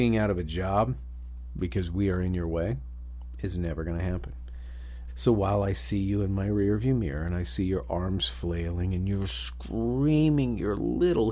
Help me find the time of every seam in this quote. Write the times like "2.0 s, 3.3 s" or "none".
5.1 s